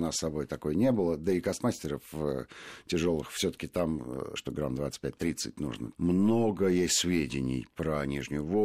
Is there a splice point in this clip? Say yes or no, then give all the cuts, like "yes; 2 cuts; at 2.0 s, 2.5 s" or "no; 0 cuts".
yes; 2 cuts; at 4.4 s, 5.9 s